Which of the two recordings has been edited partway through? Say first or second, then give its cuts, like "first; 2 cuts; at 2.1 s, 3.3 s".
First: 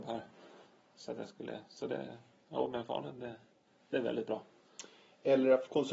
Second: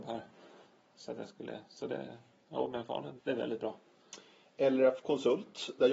second; 1 cut; at 3.2 s